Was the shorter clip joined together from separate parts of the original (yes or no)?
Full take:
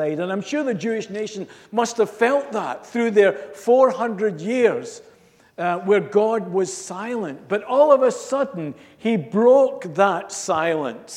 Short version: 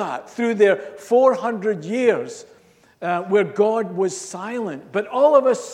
no